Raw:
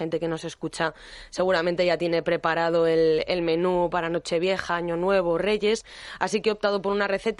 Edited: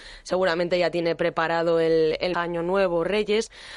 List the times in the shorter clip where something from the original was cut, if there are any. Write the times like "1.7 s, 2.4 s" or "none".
2.3 s

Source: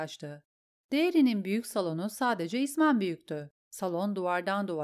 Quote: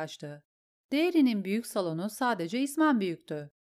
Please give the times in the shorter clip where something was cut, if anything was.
none

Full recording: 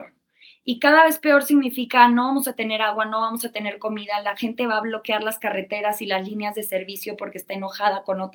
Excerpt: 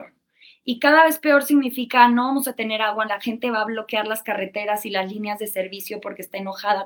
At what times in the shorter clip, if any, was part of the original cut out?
3.1 s

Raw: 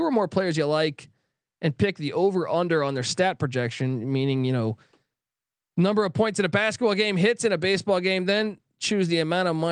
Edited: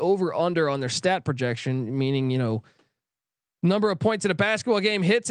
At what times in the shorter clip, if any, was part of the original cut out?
none

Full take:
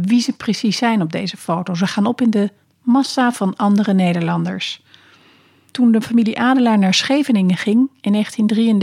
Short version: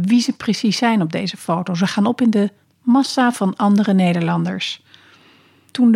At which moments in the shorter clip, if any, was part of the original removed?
none

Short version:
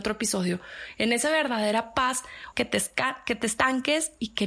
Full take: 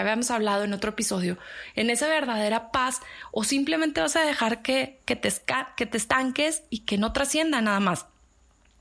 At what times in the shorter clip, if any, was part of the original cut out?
2.5 s

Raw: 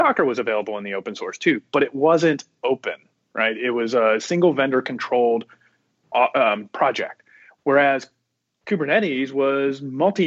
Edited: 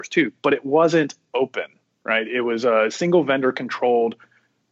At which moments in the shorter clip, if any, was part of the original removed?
none

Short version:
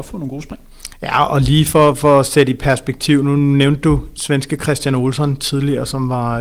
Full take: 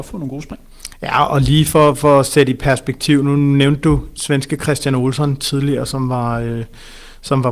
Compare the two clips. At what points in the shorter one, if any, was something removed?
none

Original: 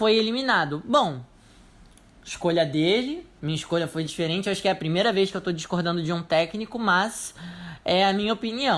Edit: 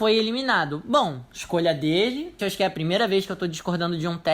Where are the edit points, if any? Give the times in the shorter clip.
1.3 s, 2.4 s

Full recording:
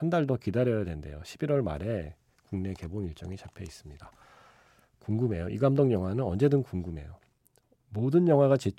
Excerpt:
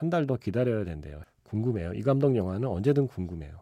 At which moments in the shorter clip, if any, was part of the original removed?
1.2 s

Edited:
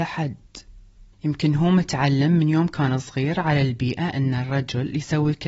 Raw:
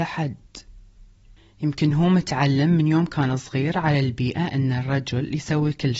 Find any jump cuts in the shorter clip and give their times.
1.1 s

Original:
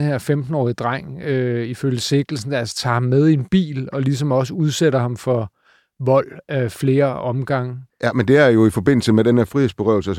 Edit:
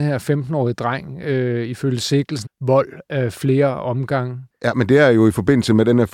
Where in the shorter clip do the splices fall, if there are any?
2.5 s

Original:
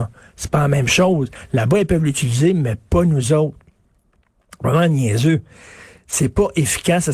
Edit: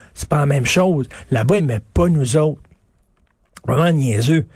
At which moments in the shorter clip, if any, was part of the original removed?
1.6 s

